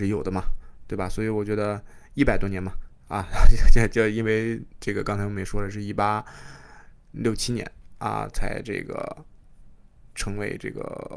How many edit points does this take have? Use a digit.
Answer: 0